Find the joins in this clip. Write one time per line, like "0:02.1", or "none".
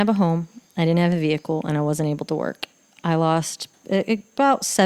none